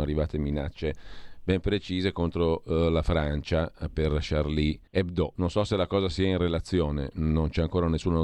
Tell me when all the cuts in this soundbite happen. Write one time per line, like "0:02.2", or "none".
0:04.9